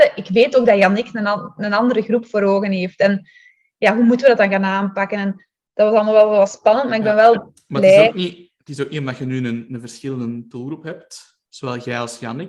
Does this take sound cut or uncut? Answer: uncut